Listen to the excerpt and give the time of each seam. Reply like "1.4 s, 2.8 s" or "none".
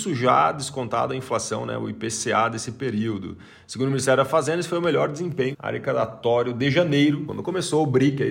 5.5 s, 7.3 s

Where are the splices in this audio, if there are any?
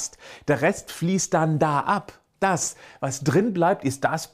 none

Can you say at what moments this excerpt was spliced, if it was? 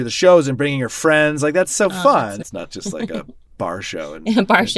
2.4 s

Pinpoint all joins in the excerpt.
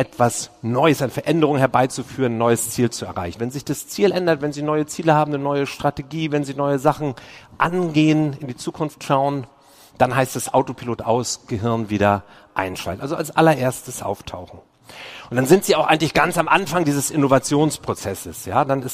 3.4 s

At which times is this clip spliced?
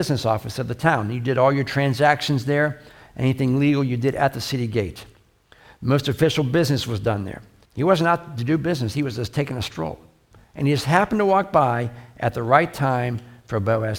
7.7 s

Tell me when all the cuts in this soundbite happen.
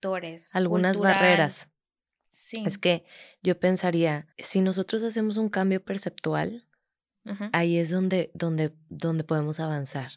4.3 s

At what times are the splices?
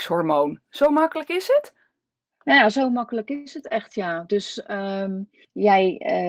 none

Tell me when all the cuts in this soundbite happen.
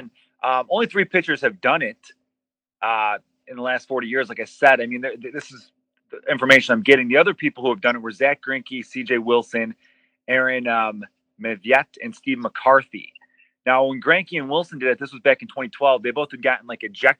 none

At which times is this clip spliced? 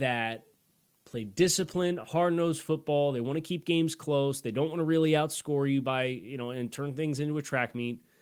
none

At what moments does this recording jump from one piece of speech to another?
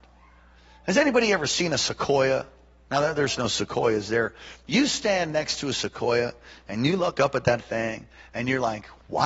none

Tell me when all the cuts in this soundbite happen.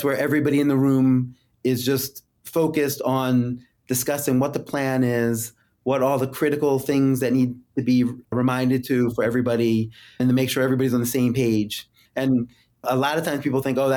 none

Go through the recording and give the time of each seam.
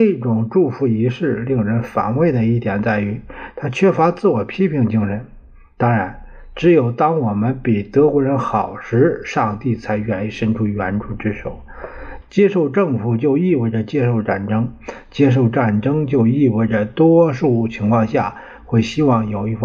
12.2 s

